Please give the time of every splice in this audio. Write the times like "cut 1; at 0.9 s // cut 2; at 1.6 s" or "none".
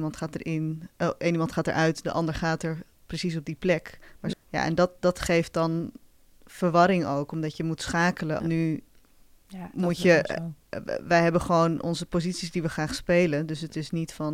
cut 1; at 4.3 s // cut 2; at 8.4 s

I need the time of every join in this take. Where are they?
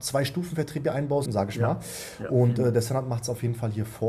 cut 1; at 1.3 s

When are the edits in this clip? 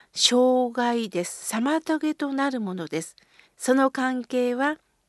cut 1; at 3.4 s

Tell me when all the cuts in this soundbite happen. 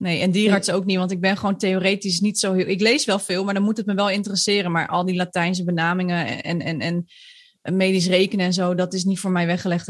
none

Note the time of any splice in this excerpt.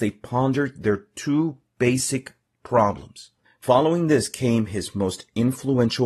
cut 1; at 3.4 s

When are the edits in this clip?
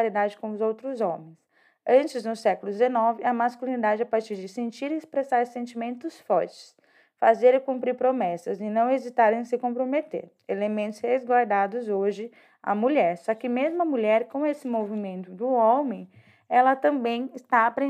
none

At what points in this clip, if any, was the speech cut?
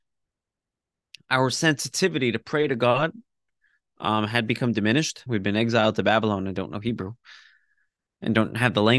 cut 1; at 5.3 s

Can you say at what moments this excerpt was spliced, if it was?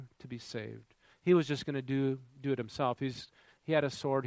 cut 1; at 1.1 s

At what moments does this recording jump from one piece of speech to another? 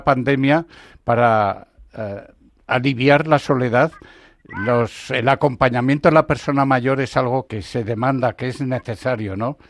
cut 1; at 7.5 s

